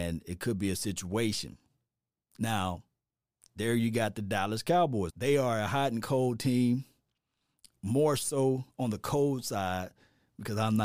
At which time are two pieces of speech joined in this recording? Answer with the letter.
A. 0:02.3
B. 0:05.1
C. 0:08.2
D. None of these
B